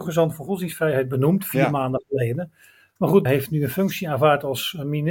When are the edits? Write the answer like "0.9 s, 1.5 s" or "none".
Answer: 3.3 s